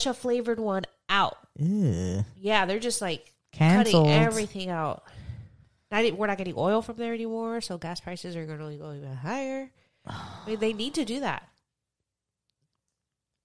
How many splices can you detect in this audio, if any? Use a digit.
0